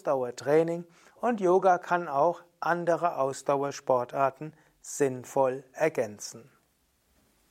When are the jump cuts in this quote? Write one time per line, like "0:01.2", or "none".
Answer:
none